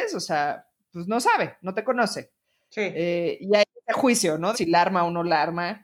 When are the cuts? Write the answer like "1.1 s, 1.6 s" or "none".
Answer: 4.5 s